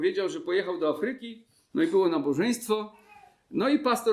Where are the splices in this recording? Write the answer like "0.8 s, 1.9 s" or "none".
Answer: none